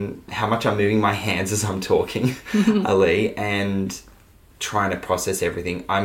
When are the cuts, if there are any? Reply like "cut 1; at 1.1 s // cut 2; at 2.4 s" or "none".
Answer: none